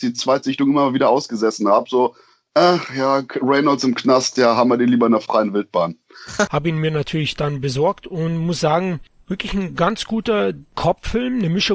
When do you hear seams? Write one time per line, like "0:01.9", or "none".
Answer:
0:06.5